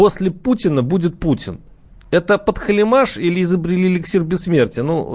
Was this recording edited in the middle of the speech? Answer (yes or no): no